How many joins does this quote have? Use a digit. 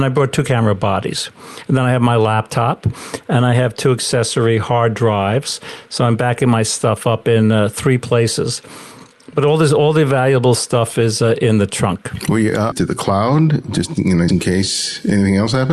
2